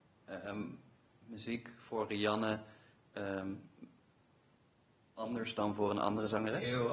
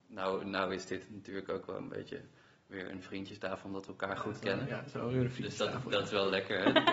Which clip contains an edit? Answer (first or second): first